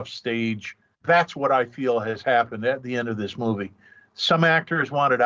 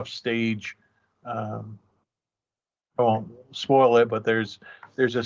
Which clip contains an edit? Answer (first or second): first